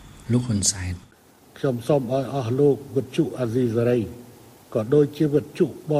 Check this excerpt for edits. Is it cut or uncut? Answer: uncut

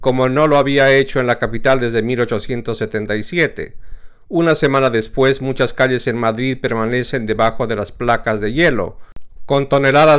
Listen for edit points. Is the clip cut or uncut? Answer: uncut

